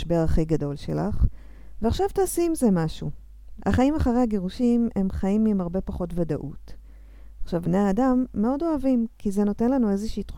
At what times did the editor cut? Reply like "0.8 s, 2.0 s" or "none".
3.6 s, 7.6 s

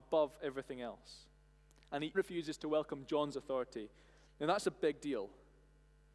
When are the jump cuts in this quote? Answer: 2.1 s

